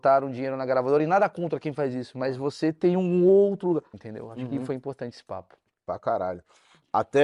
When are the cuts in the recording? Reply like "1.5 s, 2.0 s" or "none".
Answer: 3.9 s

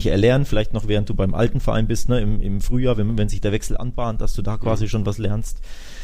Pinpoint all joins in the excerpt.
none

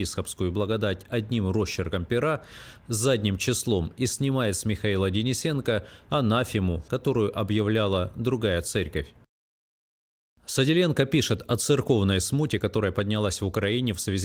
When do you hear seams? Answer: 10.4 s

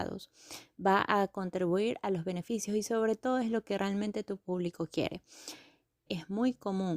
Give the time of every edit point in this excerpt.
6.1 s

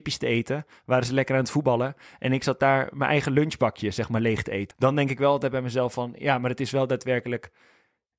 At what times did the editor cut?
4.7 s

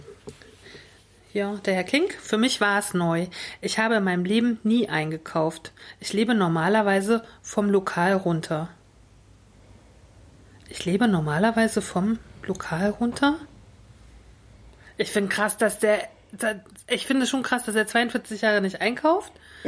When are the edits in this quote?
none

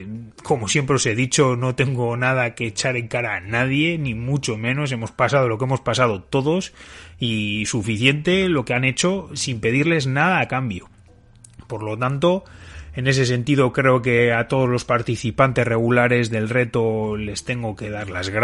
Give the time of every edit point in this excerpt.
none

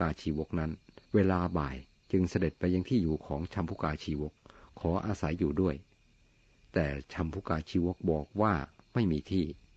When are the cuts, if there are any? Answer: 1.1 s

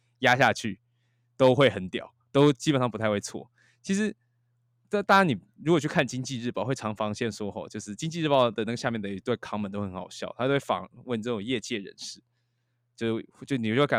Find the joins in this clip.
none

